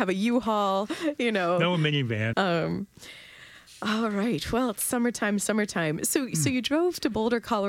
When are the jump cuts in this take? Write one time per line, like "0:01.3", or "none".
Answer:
0:02.3